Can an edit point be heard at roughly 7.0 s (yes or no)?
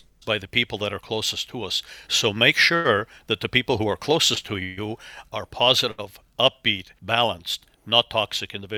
yes